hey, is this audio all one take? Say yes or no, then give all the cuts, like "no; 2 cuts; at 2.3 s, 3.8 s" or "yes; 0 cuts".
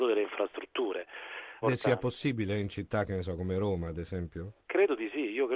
no; 1 cut; at 1.6 s